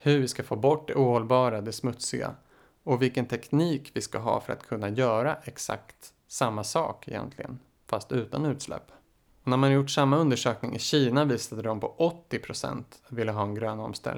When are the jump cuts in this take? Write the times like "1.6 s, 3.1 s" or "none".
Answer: 9.3 s